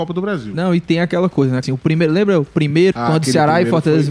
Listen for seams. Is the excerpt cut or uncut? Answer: cut